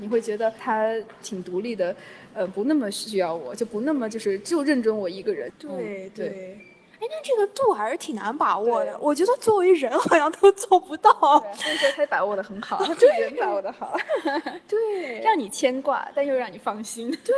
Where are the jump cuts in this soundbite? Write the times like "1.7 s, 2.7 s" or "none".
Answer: 5.5 s